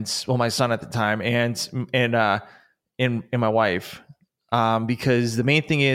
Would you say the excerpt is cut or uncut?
uncut